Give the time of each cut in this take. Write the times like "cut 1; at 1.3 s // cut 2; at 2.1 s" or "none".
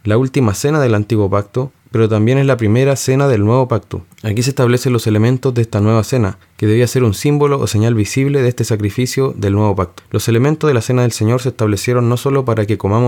none